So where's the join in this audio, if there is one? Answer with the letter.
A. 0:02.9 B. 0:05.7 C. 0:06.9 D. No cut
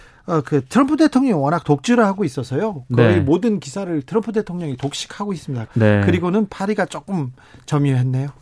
B